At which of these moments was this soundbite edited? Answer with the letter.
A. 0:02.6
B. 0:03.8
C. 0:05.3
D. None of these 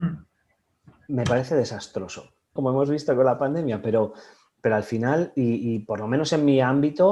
A